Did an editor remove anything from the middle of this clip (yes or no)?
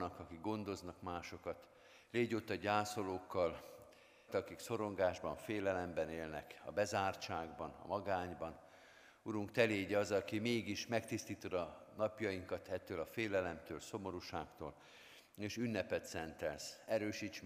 yes